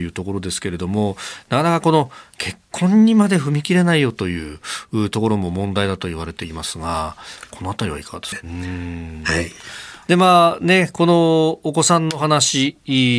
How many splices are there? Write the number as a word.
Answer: one